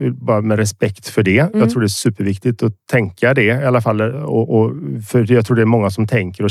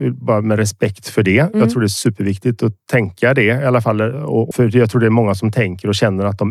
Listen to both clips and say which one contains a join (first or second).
second